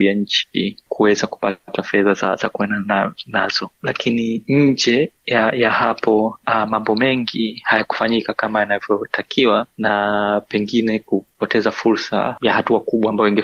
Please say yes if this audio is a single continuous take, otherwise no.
yes